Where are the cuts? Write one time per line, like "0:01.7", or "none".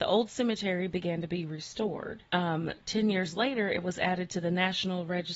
0:02.3